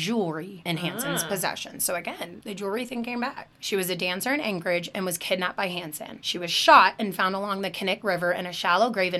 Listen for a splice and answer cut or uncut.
cut